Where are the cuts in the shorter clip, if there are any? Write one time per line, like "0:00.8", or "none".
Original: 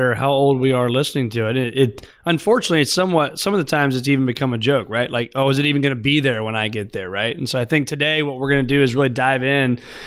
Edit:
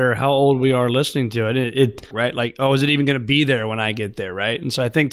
0:02.1